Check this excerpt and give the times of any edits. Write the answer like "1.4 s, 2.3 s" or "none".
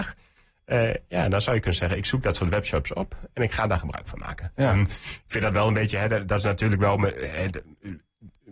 none